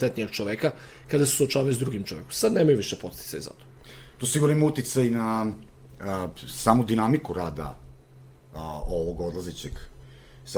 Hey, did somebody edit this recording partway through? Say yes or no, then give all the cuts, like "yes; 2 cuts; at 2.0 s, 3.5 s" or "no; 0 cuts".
no; 0 cuts